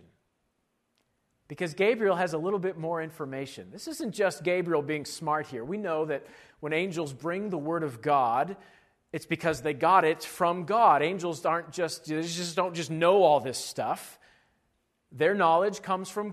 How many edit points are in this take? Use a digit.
0